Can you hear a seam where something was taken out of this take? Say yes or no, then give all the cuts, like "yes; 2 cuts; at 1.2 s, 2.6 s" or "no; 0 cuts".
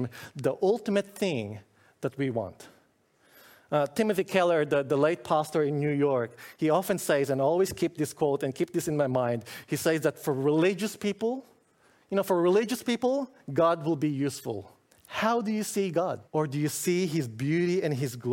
yes; 2 cuts; at 14.9 s, 16.3 s